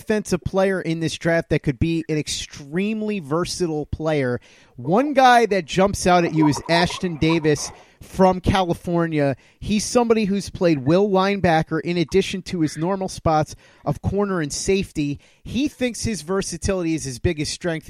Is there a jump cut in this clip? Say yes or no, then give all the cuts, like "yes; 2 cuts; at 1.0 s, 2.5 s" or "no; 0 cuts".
no; 0 cuts